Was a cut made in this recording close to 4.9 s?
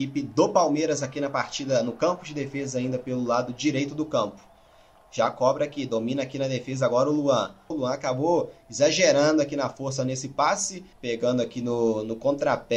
no; 2 cuts; at 7.7 s, 10.9 s

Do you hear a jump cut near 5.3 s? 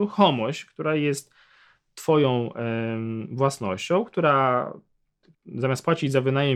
yes; 1 cut; at 5.3 s

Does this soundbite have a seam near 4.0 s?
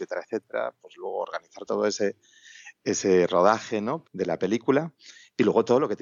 yes; 1 cut; at 4.0 s

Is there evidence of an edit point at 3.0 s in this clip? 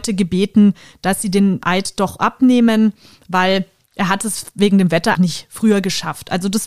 no; 1 cut; at 5.1 s

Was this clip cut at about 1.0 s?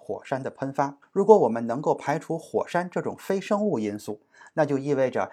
yes; 1 cut; at 1.0 s

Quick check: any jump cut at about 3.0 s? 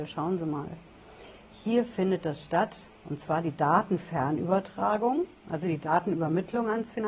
no; 0 cuts

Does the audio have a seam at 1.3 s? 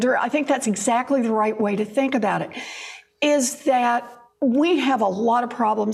no; 0 cuts

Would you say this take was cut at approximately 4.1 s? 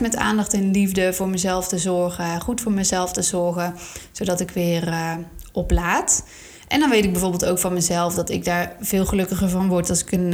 no; 0 cuts

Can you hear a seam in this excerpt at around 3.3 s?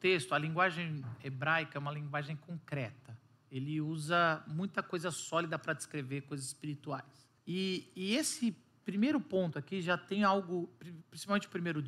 no; 1 cut; at 7.4 s

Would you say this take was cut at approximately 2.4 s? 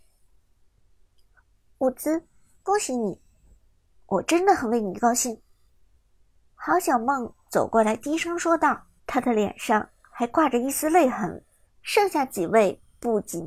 no; 2 cuts; at 9.0 s, 11.6 s

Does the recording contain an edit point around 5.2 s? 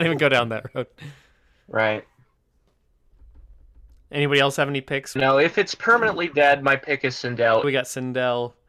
yes; 2 cuts; at 5.2 s, 7.6 s

